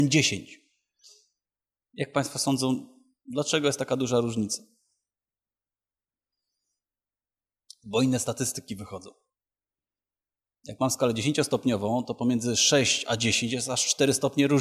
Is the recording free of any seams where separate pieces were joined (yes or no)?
yes